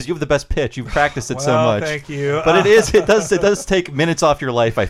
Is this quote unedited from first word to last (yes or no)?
yes